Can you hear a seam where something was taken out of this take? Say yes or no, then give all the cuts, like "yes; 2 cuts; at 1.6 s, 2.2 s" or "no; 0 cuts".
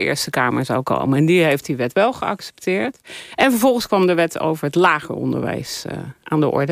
no; 0 cuts